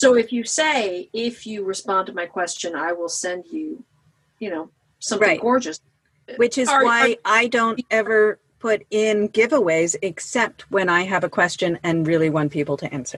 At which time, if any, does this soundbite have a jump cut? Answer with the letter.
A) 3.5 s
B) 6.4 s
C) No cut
C